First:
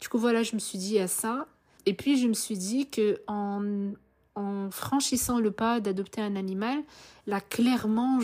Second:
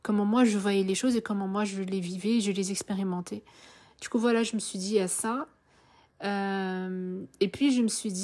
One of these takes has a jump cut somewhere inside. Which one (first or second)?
first